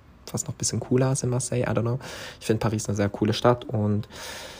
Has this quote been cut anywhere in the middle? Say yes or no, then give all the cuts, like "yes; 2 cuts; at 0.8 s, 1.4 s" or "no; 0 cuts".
no; 0 cuts